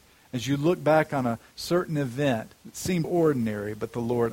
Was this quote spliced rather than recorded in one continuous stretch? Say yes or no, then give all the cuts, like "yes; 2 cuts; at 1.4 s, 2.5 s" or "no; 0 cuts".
yes; 1 cut; at 3.0 s